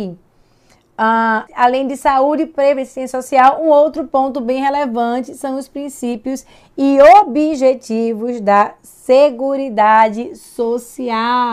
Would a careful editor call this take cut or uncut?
cut